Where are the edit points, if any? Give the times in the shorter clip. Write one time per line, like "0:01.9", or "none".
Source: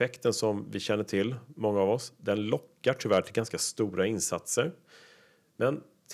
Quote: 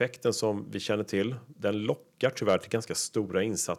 0:01.5